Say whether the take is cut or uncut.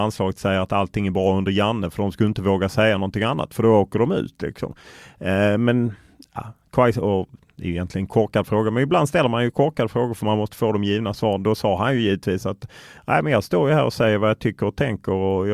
uncut